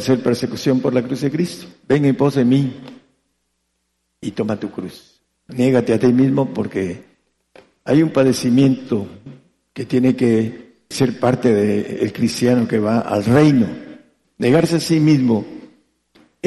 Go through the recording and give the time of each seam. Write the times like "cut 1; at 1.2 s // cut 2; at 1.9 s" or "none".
cut 1; at 1.8 s // cut 2; at 10.9 s // cut 3; at 14.2 s